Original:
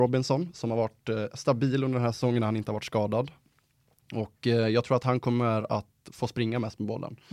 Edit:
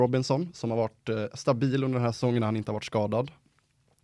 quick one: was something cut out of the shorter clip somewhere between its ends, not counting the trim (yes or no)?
no